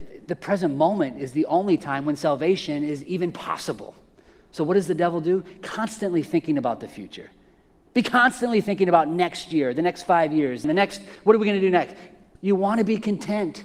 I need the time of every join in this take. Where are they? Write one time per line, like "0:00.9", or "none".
0:10.6
0:12.4